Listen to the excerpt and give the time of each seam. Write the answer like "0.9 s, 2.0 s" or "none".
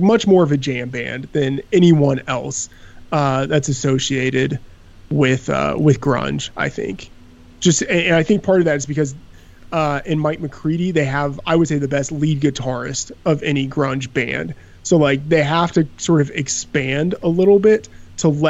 none